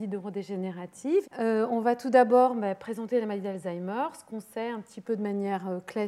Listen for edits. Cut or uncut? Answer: cut